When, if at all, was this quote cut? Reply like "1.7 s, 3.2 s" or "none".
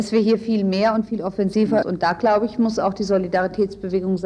1.8 s

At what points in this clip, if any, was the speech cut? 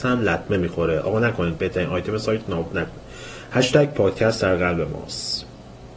none

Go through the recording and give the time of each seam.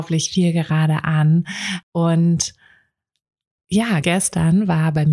1.8 s, 4.0 s

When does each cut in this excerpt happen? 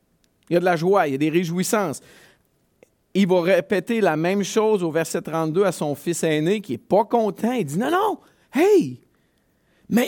none

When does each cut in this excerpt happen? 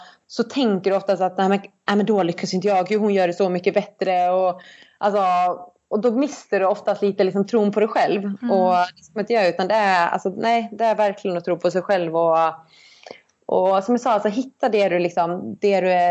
none

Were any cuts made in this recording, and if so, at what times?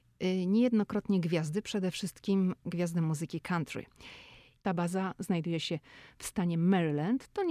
4.6 s

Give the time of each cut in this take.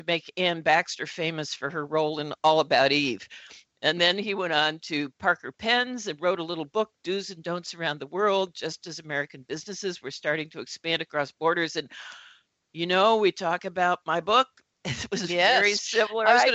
none

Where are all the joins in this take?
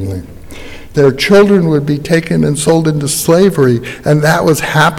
0.9 s

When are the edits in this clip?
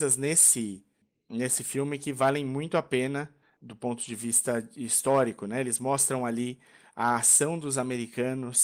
none

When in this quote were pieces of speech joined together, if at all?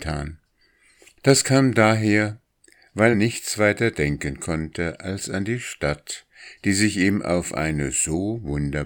3.1 s

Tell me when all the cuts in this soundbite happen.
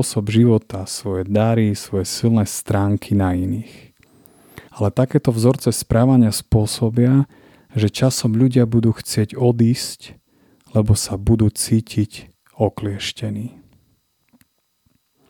4.7 s

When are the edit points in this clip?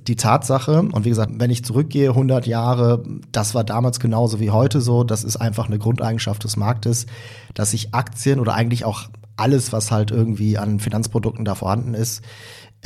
1.3 s

